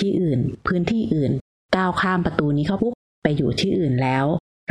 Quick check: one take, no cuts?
no; 1 cut; at 2.8 s

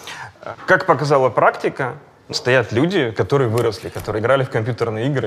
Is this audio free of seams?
no; 1 cut; at 2.3 s

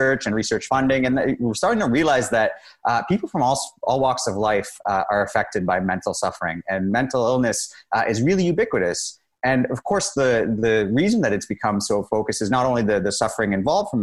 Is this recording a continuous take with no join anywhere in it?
yes; 0 cuts

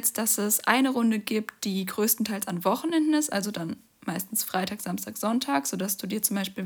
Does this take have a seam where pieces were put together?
no; 0 cuts

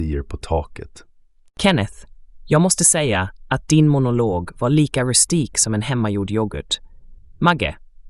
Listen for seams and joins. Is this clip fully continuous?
no; 1 cut; at 7.2 s

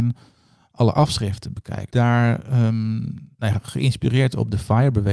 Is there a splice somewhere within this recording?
yes; 2 cuts; at 1.9 s, 3.3 s

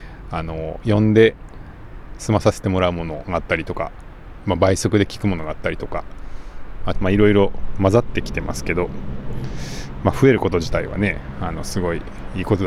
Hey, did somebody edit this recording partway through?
yes; 1 cut; at 6.9 s

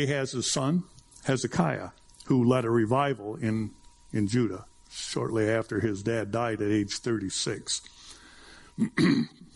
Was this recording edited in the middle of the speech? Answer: no; 0 cuts

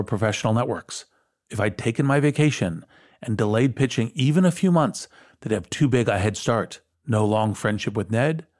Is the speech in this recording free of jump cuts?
no; 1 cut; at 6.9 s

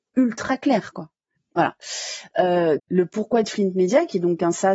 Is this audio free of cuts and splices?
no; 2 cuts; at 1.4 s, 2.8 s

